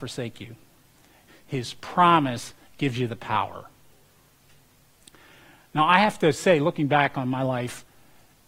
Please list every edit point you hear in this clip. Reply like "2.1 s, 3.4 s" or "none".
1.3 s

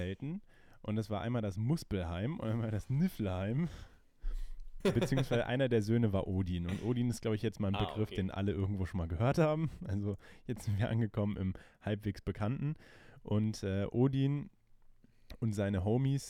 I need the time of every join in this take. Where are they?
4.8 s

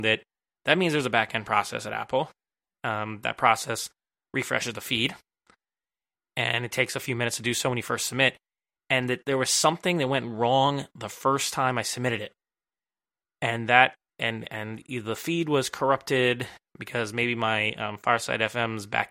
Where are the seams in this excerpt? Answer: none

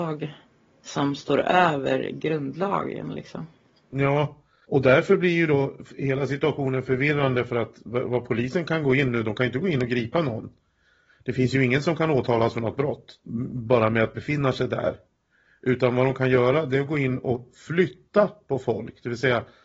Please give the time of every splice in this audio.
none

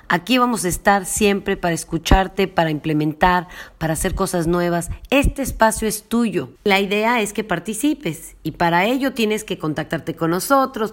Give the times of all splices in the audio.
6.6 s

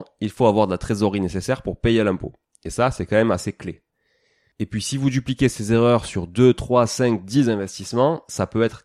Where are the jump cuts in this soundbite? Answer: none

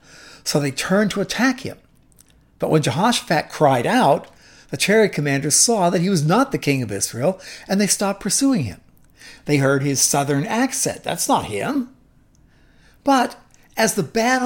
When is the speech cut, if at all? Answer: none

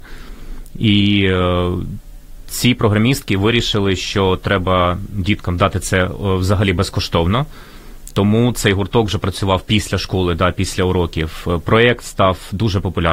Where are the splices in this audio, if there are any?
8.1 s

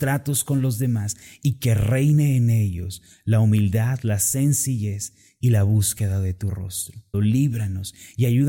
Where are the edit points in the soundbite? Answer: 7.1 s

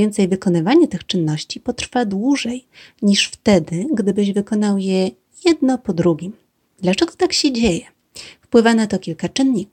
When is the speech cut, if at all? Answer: 6.7 s

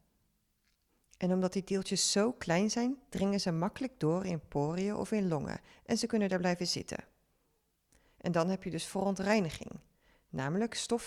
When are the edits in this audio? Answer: none

